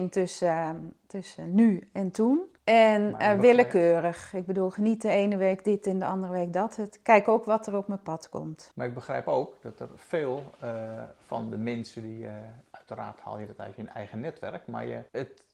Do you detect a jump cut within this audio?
no; 0 cuts

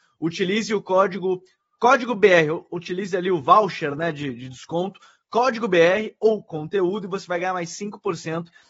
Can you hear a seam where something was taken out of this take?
no; 0 cuts

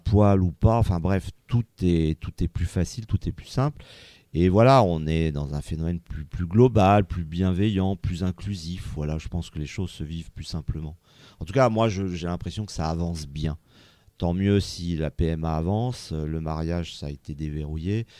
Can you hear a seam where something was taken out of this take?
no; 0 cuts

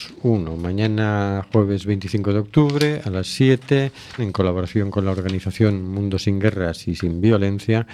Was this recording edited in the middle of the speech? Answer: yes; 1 cut; at 4.2 s

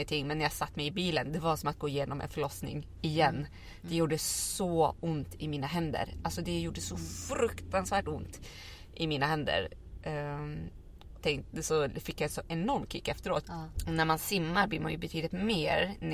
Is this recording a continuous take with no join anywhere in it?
no; 2 cuts; at 11.2 s, 13.4 s

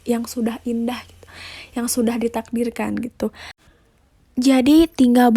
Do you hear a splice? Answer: no; 0 cuts

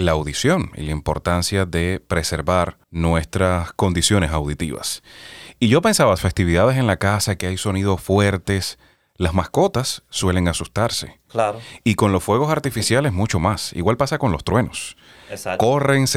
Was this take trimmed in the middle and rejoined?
yes; 2 cuts; at 2.8 s, 6.2 s

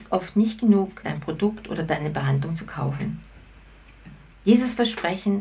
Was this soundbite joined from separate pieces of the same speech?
yes; 2 cuts; at 1.0 s, 4.3 s

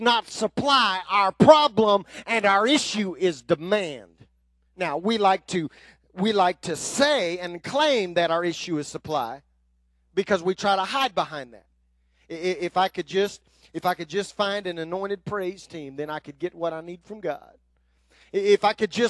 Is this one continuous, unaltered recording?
yes; 0 cuts

